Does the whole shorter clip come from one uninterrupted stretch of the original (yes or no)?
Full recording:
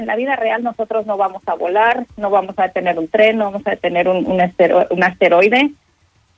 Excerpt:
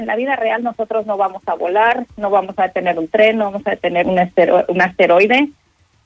no